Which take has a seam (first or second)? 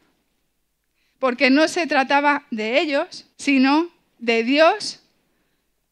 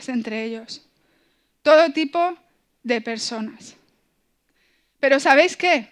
first